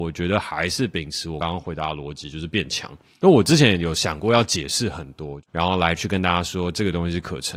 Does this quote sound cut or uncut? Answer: cut